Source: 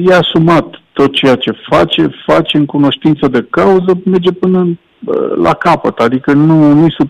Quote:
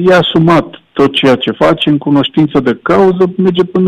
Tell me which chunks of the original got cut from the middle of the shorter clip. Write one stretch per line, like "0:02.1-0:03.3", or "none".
0:01.6-0:02.2